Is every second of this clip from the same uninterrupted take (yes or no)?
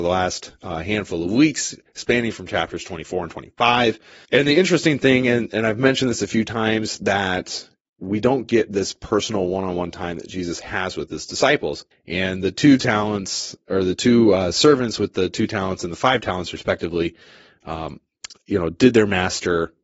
no